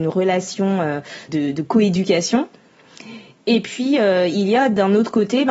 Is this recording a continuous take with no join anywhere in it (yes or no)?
no